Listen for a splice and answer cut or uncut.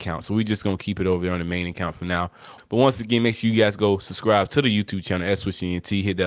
cut